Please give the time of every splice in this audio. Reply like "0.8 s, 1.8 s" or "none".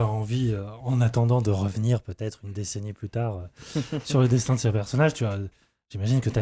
none